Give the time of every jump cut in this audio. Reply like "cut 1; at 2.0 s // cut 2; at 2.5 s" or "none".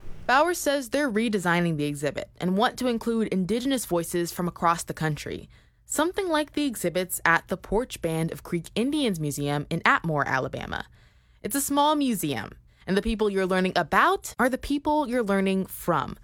none